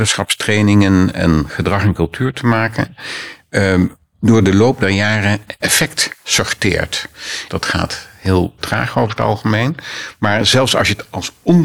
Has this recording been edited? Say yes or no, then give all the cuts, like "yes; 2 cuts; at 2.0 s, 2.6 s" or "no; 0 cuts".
yes; 2 cuts; at 7.5 s, 8.6 s